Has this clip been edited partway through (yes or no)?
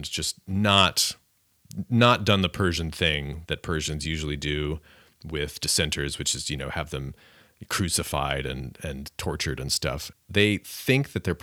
yes